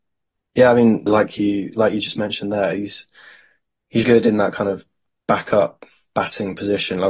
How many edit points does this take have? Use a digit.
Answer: 2